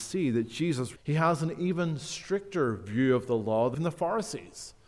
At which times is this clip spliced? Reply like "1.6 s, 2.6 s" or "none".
1.0 s, 3.7 s